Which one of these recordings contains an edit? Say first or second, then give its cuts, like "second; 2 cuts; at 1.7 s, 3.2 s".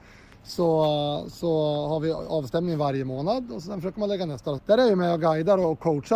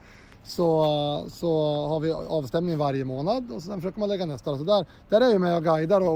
first; 1 cut; at 4.6 s